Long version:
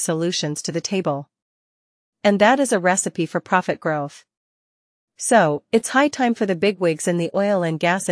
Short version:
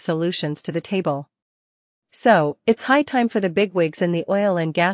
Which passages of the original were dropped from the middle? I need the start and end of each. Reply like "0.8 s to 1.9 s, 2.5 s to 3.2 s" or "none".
2.0 s to 5.1 s